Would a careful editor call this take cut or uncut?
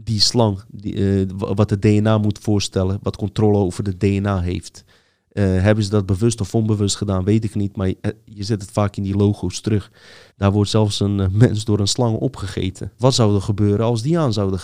cut